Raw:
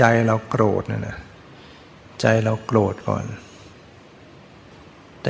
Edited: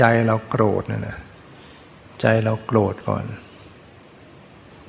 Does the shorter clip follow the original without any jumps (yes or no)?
yes